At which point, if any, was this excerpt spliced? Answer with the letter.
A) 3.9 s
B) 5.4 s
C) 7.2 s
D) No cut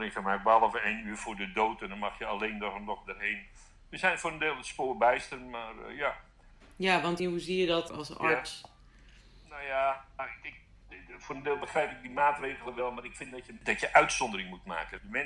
C